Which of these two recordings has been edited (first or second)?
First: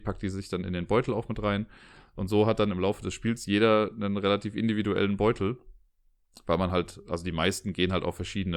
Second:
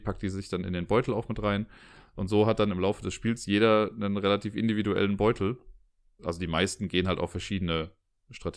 second